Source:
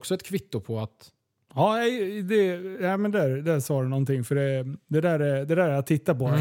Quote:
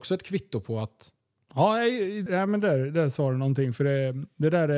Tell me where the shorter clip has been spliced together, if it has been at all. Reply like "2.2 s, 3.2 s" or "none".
2.3 s